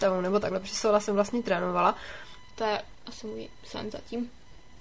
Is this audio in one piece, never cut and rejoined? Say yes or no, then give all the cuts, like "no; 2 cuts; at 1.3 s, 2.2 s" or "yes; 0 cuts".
no; 1 cut; at 2.5 s